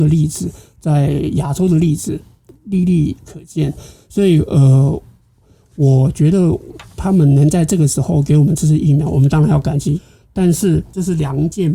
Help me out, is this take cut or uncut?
uncut